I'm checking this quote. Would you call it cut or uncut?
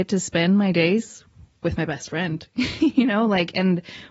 uncut